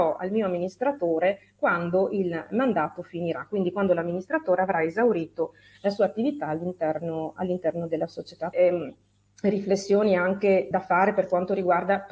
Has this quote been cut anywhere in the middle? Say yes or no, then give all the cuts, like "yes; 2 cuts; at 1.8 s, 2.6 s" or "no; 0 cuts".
yes; 2 cuts; at 8.5 s, 10.7 s